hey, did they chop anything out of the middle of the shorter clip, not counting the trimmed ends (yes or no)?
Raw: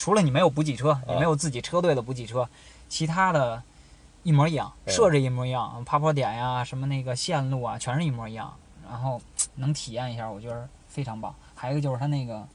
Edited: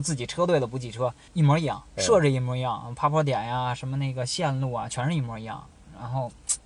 yes